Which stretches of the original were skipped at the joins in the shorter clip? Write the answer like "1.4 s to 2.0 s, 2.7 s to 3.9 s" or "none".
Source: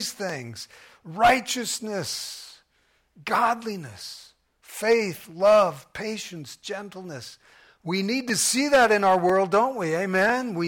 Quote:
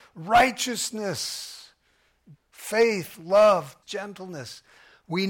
3.2 s to 4.4 s, 5.9 s to 6.6 s